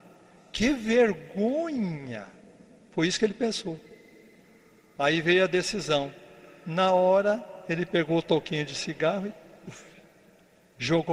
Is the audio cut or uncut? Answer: uncut